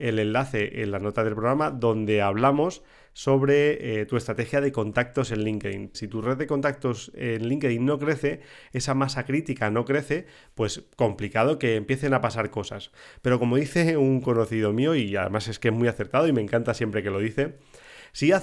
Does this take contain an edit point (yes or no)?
yes